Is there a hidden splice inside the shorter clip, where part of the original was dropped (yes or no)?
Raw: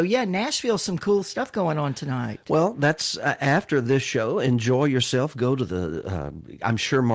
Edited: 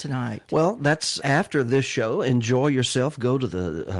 yes